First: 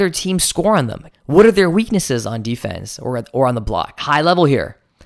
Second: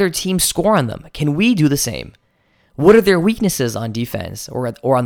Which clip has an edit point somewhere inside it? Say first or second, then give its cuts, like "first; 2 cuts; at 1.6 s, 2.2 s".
first; 2 cuts; at 1.1 s, 4.0 s